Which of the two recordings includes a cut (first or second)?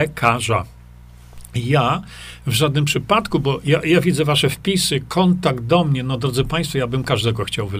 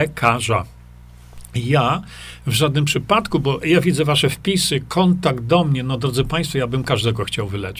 second